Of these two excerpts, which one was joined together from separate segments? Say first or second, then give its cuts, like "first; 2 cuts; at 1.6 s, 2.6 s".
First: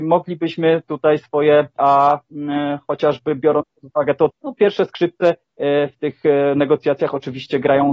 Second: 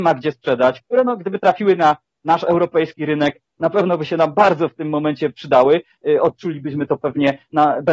first; 2 cuts; at 1.8 s, 4.3 s